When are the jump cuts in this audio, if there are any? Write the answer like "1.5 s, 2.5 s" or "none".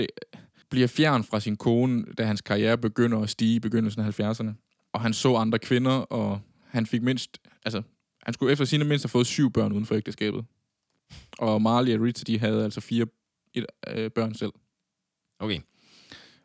4.9 s